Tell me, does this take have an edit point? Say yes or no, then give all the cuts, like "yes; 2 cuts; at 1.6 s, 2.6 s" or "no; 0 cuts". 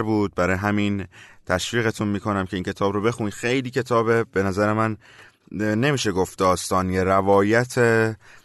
no; 0 cuts